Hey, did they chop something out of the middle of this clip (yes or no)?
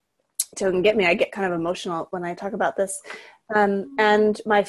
no